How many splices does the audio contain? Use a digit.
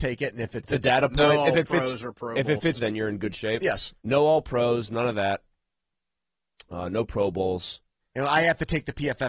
3